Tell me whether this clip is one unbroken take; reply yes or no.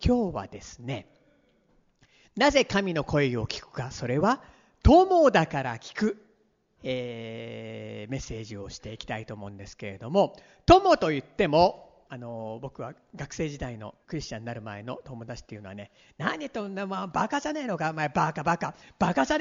no